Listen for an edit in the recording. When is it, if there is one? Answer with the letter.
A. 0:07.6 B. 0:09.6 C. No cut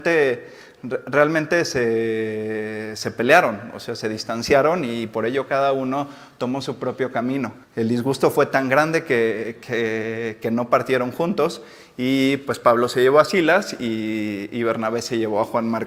A